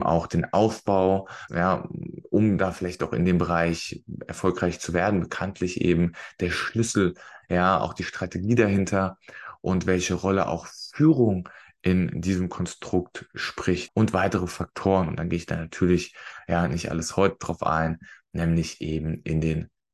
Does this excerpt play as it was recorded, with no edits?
no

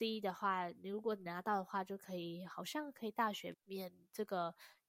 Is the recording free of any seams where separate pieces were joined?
no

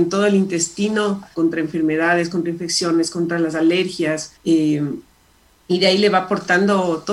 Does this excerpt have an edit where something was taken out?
yes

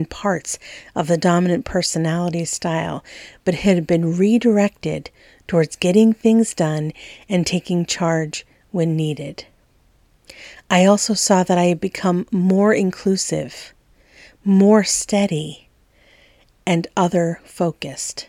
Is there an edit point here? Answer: no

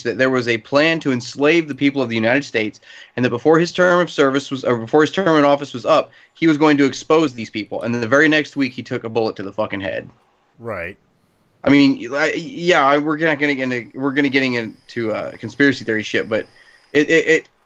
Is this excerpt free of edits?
yes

